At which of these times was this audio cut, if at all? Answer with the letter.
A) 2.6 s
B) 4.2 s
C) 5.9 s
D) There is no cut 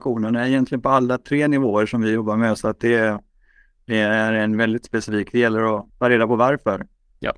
C